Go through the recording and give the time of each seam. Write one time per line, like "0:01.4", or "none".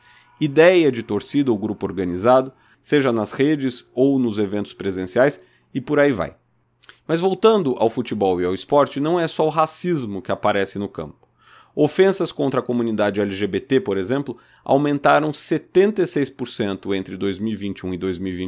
0:02.7